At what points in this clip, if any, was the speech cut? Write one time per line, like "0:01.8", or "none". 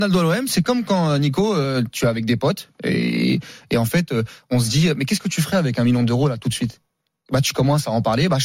none